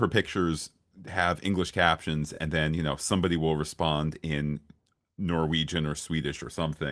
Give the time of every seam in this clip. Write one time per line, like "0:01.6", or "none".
none